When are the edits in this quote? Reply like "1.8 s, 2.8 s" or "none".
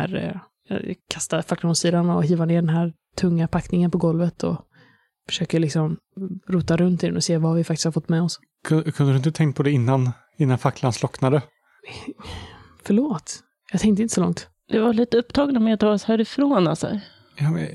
none